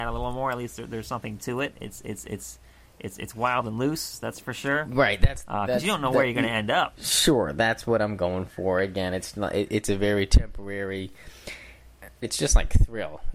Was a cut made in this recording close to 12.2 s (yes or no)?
yes